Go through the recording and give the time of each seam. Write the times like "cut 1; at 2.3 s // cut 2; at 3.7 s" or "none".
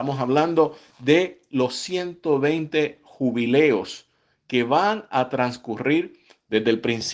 none